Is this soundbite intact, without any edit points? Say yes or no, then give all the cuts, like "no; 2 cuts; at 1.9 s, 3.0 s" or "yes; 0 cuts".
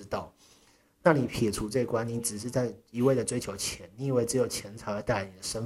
yes; 0 cuts